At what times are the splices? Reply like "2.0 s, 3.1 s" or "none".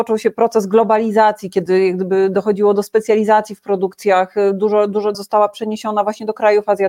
5.1 s